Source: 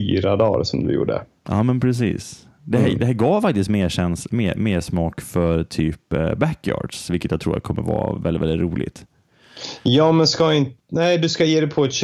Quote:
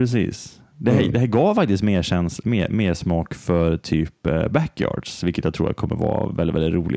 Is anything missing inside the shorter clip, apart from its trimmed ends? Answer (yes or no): no